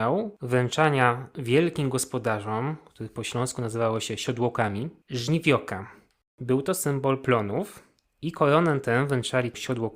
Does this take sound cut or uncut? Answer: cut